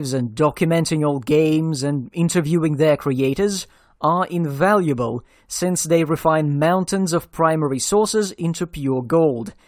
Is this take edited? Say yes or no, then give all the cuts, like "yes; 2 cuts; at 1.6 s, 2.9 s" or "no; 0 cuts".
no; 0 cuts